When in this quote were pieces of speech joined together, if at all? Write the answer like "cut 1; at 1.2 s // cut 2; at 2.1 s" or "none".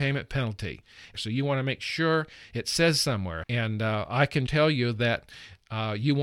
cut 1; at 1.1 s // cut 2; at 3.4 s // cut 3; at 4.5 s